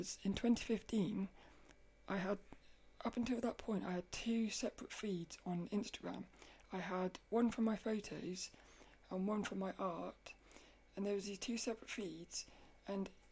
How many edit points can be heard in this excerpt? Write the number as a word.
zero